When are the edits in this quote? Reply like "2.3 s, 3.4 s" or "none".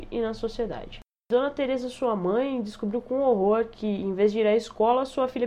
none